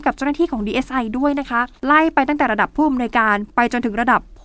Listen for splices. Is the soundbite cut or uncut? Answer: cut